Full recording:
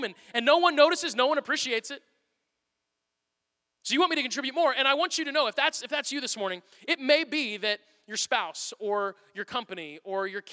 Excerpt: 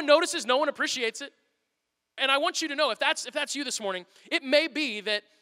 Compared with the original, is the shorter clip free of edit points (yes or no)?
no